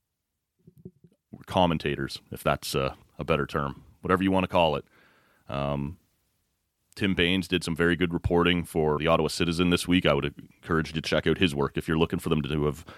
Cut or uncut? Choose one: cut